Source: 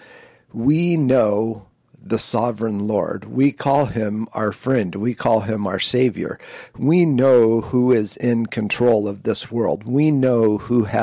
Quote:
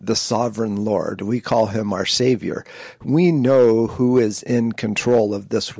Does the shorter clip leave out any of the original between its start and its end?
yes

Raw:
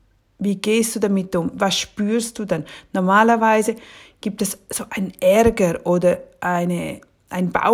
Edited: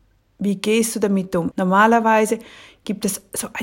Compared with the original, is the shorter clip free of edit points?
no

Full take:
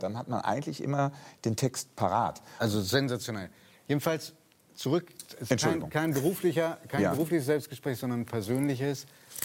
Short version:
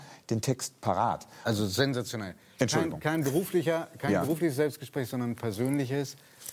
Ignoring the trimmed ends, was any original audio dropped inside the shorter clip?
yes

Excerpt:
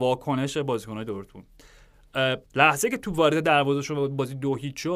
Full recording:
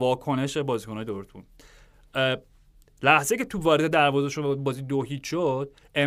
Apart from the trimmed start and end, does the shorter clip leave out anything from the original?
yes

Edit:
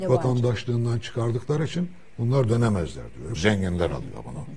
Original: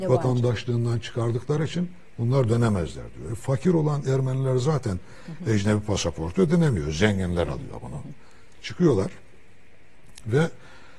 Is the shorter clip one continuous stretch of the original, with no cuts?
no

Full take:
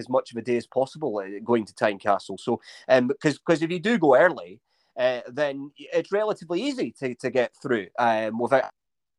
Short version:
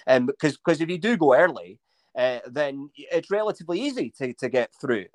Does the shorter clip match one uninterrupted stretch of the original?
yes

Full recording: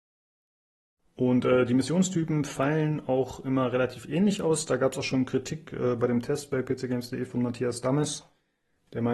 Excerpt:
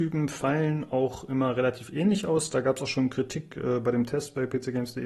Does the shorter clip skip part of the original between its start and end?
no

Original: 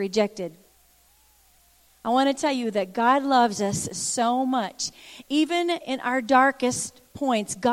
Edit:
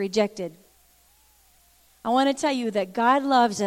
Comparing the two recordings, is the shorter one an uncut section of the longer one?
yes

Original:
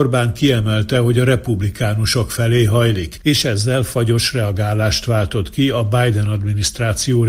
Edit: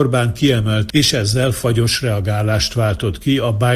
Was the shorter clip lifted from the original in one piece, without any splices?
no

